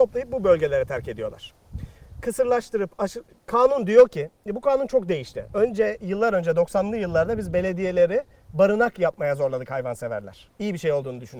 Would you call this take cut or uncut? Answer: uncut